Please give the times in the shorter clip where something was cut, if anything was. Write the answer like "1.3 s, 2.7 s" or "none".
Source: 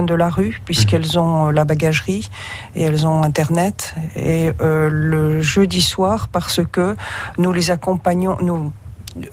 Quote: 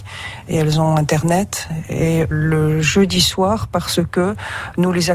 2.3 s